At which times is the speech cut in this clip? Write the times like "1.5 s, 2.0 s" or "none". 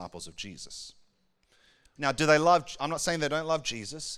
2.0 s

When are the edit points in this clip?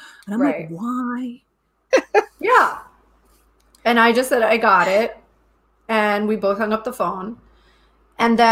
1.9 s

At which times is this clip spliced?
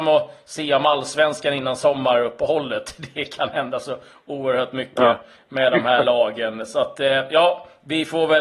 none

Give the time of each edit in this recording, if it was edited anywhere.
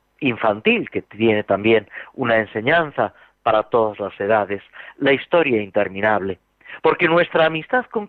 6.8 s

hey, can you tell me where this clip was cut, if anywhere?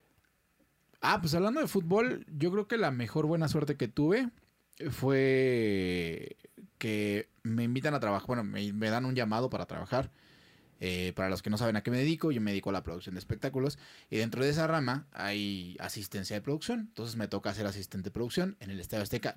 none

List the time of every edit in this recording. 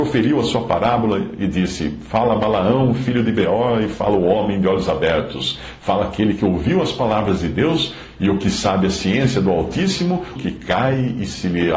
10.4 s

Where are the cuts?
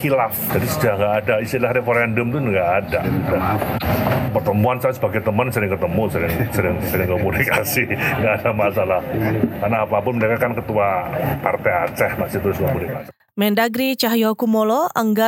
none

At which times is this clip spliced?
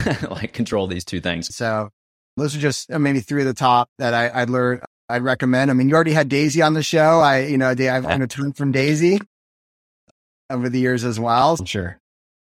1.5 s, 11.6 s

